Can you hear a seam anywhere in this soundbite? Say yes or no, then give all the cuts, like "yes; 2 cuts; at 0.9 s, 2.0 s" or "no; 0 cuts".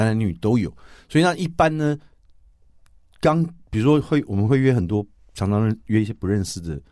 no; 0 cuts